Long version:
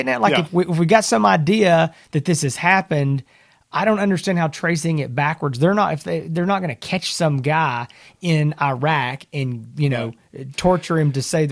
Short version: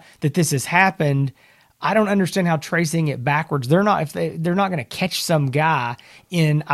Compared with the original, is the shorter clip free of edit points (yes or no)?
yes